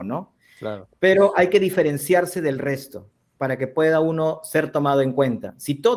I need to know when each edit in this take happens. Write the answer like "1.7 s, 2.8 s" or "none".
none